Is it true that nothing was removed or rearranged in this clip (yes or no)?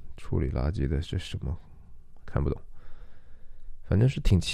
no